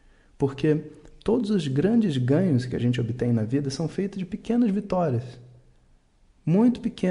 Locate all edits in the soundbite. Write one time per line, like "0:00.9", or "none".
none